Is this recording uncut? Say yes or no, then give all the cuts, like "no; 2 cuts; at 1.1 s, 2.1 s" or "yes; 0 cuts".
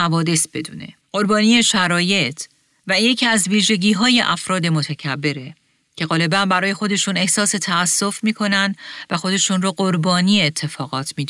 no; 1 cut; at 1.0 s